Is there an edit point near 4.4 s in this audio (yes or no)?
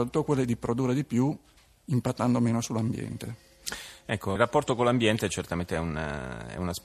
yes